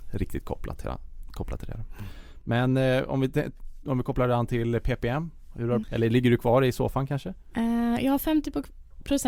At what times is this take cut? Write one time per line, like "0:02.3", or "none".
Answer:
0:05.8

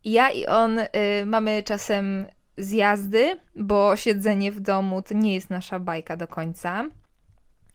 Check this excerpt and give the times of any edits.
0:05.0

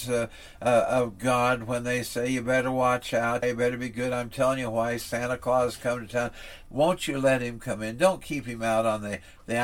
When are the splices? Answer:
0:03.4
0:06.7

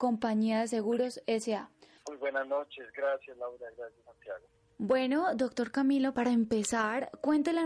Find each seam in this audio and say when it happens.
0:02.0

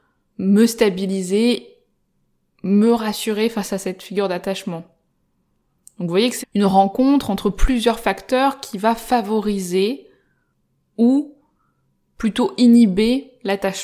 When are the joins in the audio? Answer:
0:06.4

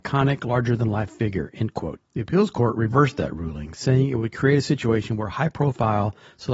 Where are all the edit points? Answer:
0:02.0

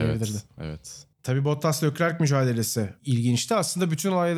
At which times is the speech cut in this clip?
0:01.1

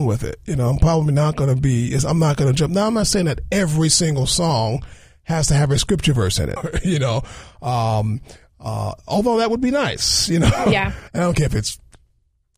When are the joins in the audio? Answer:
0:06.6
0:11.1

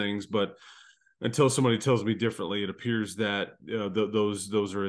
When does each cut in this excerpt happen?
none

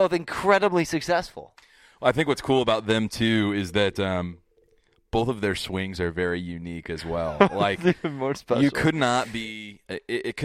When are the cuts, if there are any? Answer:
none

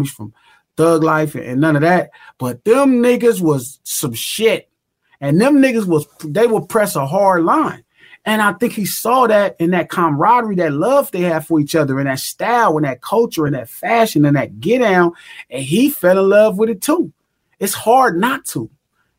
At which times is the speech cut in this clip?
none

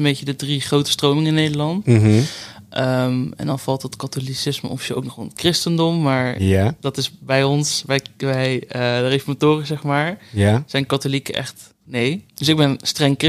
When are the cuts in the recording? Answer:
0:11.8

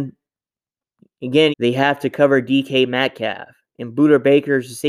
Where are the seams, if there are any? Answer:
0:01.5

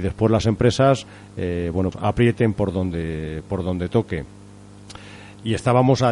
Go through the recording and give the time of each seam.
0:01.9

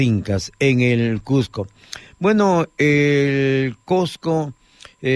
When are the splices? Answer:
none

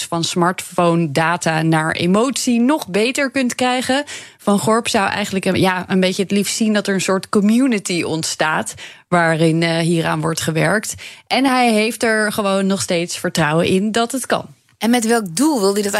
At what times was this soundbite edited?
none

